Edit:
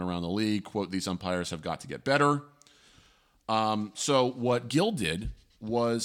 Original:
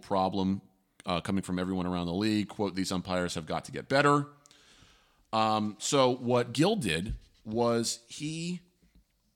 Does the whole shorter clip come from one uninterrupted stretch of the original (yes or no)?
yes